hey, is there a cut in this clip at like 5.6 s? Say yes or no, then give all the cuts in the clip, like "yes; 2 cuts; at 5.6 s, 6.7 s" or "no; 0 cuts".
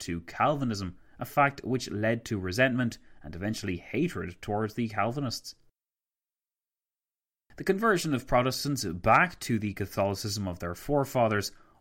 no; 0 cuts